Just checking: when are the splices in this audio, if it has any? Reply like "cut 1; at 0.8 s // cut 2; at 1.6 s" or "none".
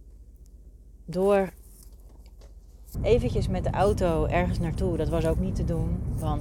cut 1; at 2.9 s